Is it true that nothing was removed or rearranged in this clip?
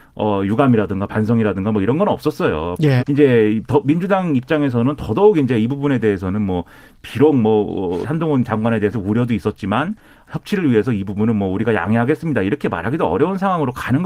no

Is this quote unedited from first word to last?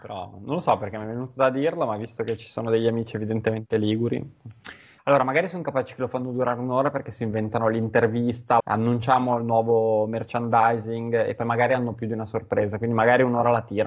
no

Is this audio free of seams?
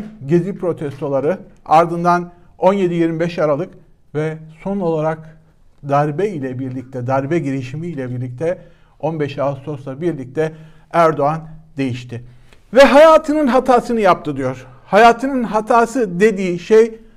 yes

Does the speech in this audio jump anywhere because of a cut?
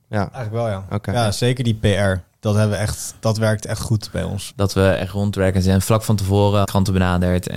yes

